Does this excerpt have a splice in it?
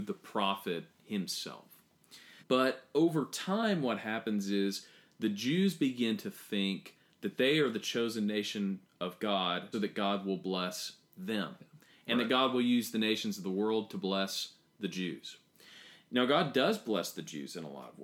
yes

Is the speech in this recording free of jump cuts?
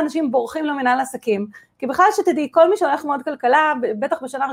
yes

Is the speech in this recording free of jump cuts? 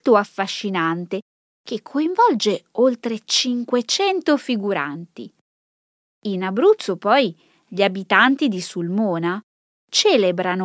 yes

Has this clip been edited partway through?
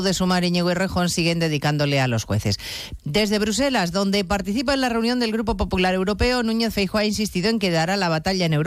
yes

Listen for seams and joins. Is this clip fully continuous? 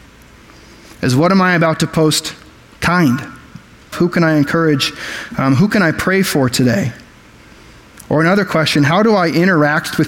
no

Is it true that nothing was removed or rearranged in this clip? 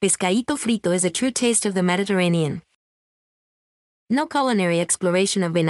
no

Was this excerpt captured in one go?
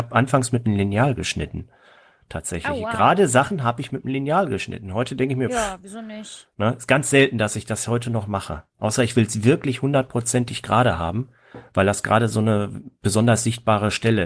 yes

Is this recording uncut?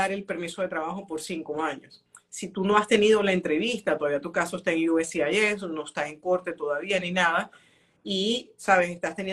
yes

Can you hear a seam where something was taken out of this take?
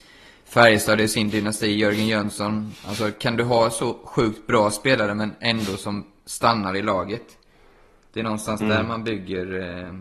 no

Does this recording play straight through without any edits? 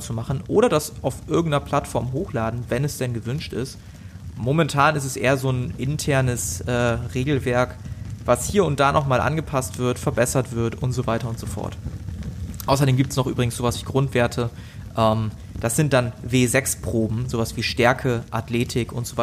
yes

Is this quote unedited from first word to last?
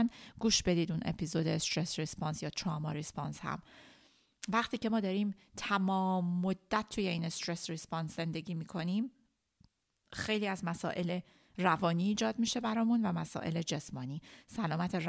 yes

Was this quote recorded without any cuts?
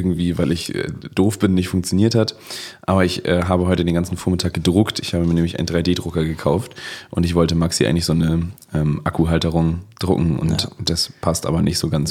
yes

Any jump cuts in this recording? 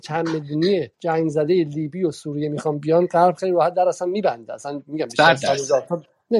yes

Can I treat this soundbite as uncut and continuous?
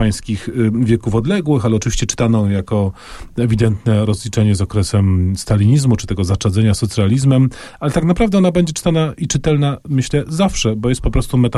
yes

